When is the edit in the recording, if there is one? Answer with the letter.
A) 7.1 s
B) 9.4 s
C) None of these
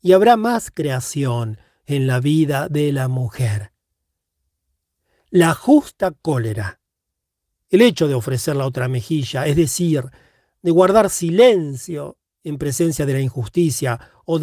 C